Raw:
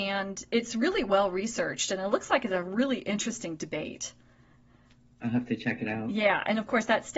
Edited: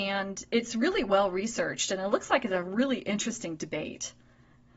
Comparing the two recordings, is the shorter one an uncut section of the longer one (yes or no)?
yes